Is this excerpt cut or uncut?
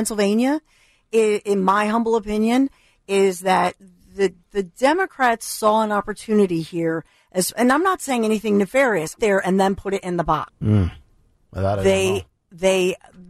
cut